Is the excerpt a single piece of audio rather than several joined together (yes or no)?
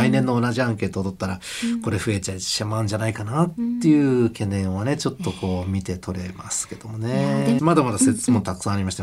no